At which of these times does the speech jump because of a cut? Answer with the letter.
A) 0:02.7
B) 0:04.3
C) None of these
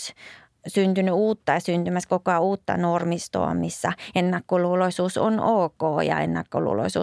C